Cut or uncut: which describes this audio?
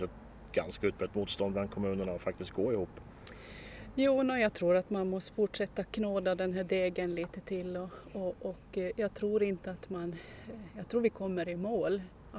uncut